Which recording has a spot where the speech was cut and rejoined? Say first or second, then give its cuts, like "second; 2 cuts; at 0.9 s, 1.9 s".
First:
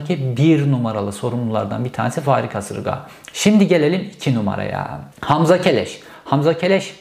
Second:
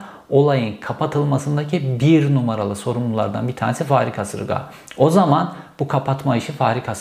first; 2 cuts; at 3.3 s, 5.1 s